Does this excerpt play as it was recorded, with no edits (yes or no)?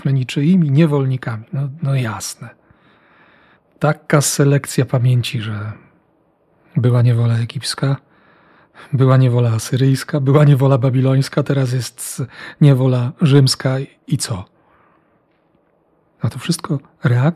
yes